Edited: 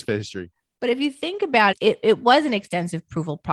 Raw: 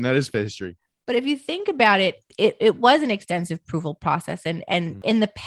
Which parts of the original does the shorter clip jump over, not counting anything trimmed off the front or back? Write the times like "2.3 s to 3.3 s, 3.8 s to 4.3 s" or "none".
2.0 s to 2.3 s